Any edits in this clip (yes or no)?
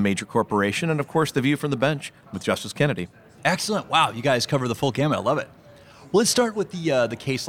no